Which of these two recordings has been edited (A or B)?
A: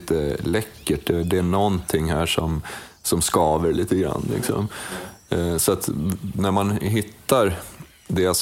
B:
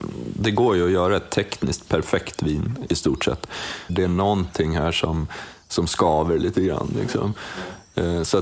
B